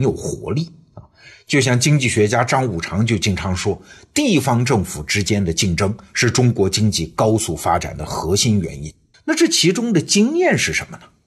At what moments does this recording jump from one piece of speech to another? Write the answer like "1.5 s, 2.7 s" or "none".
9.1 s